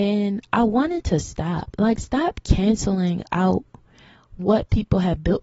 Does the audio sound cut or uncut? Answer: uncut